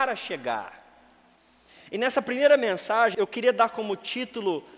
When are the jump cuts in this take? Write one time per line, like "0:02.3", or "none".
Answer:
0:03.1